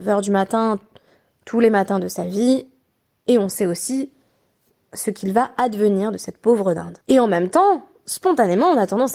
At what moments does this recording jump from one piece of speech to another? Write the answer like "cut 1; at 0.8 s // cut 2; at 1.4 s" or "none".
cut 1; at 7.0 s